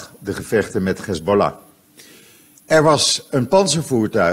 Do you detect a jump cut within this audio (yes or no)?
yes